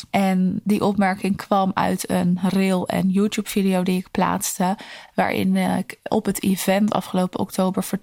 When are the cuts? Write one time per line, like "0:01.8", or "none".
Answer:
none